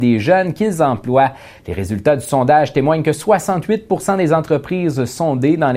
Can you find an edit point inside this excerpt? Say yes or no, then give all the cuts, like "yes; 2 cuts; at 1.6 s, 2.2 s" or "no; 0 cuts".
yes; 1 cut; at 1.6 s